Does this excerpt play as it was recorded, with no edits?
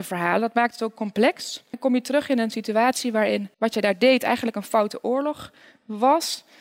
no; 2 cuts; at 1.7 s, 3.5 s

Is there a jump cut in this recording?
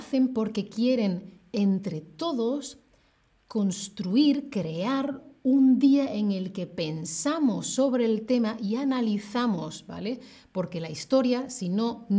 no; 0 cuts

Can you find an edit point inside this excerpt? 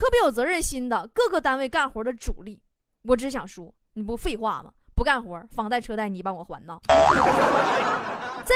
no; 0 cuts

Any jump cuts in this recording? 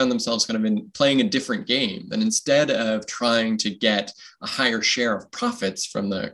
no; 0 cuts

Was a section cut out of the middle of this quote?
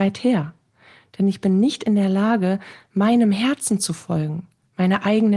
no; 0 cuts

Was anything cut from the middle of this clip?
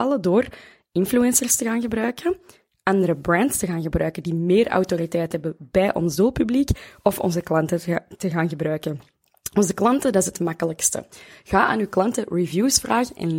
no; 0 cuts

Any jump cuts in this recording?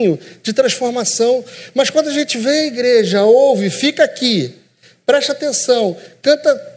no; 0 cuts

